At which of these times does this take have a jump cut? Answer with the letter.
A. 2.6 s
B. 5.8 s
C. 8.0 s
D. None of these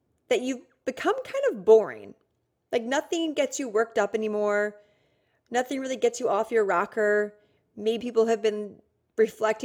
C